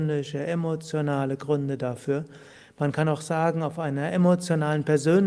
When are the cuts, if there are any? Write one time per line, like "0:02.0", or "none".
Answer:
none